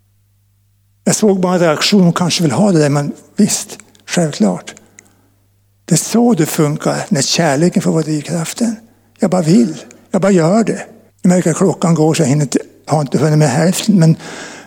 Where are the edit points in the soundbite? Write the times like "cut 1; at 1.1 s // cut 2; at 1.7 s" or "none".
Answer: cut 1; at 11.1 s